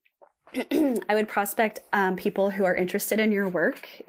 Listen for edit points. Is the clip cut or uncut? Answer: uncut